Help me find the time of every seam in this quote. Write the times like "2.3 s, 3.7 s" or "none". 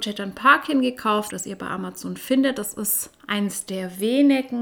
1.3 s